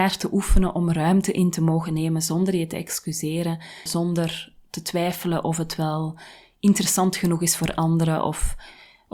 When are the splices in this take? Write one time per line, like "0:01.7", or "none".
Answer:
0:03.9

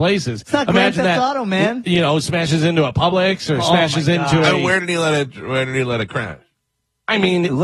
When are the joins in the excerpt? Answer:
none

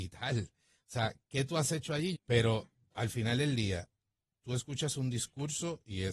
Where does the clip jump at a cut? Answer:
0:02.1

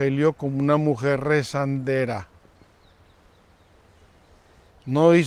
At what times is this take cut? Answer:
none

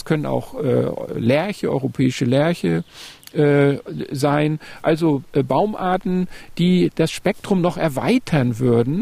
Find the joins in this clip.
none

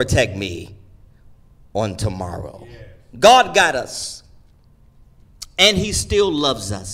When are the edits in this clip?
0:03.1

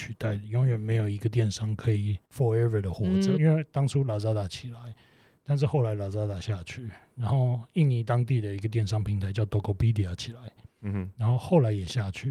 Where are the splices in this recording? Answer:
0:02.2
0:03.4

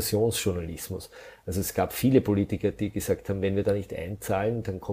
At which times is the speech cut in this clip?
none

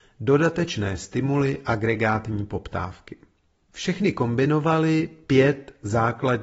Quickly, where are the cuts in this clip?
0:03.7

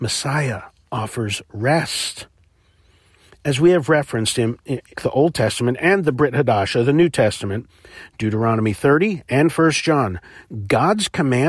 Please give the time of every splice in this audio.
0:04.9

